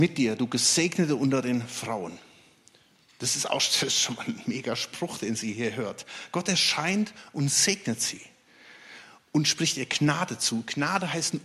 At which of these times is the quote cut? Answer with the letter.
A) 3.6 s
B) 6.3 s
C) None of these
C